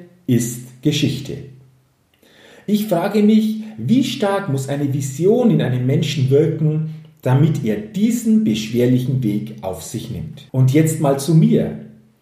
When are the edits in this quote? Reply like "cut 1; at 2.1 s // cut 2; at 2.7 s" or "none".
cut 1; at 10.5 s